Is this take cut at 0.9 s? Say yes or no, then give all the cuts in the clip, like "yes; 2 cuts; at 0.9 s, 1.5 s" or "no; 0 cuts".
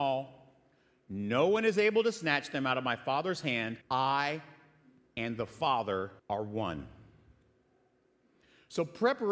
no; 2 cuts; at 3.8 s, 6.2 s